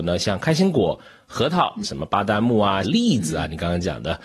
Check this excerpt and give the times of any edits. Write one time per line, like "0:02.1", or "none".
0:01.8
0:02.8